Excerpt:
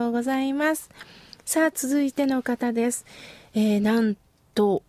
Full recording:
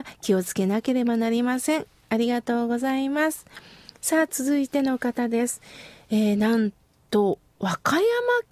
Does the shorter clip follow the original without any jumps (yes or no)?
yes